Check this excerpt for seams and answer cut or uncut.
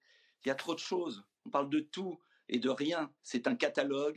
cut